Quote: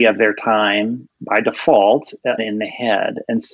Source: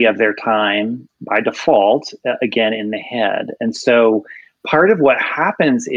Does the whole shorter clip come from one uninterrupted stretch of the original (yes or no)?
no